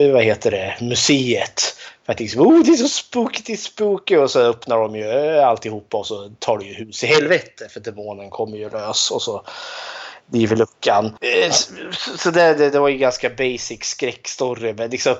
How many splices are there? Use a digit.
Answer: 0